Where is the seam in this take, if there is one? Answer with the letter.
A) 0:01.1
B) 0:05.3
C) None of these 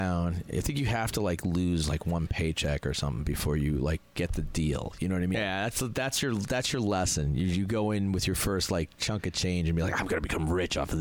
B